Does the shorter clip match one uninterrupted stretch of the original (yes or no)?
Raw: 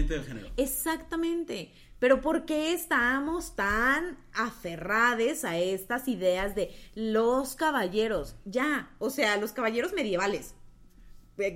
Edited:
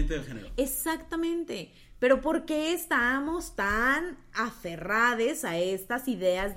yes